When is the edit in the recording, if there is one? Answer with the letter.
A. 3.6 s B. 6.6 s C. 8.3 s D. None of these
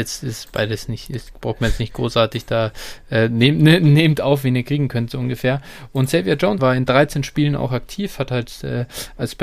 B